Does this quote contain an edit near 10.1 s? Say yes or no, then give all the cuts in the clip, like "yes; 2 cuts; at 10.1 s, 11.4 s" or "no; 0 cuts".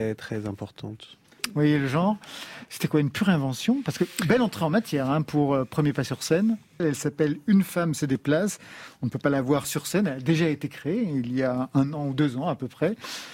no; 2 cuts; at 1.4 s, 6.8 s